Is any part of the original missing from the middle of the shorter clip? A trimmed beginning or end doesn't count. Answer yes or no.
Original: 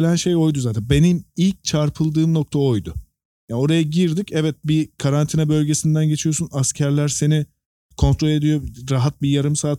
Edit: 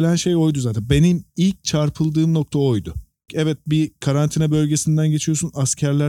yes